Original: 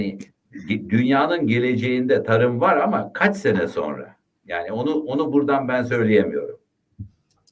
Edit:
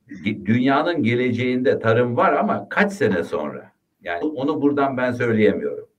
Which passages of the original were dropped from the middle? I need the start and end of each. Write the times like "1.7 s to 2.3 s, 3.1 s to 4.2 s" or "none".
4.7 s to 4.9 s